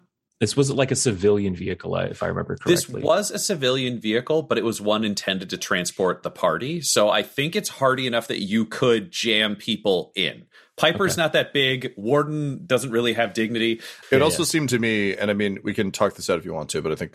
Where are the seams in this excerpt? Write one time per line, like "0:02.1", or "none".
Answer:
0:14.0